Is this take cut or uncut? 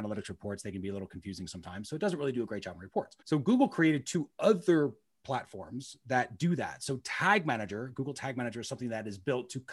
cut